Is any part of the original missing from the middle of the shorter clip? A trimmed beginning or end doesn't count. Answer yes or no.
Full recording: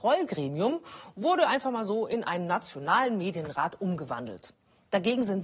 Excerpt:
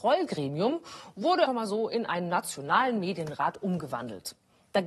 yes